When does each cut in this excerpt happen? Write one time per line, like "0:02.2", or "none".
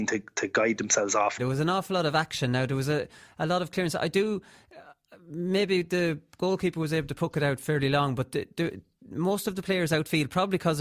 0:01.4